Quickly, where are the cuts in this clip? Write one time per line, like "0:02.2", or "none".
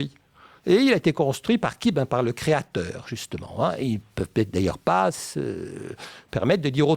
none